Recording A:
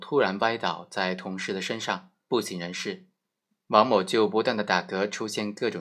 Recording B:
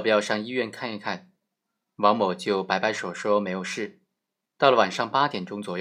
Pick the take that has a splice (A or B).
A